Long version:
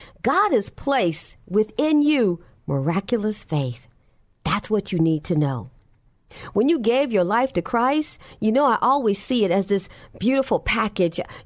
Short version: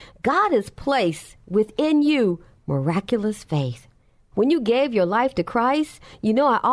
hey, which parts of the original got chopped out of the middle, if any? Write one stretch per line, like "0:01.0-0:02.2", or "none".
0:04.3-0:06.5